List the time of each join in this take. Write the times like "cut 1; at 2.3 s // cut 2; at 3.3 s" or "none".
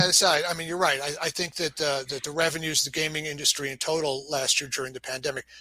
none